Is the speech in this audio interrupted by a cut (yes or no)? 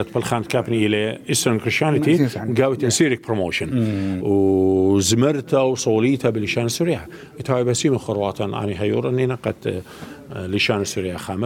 yes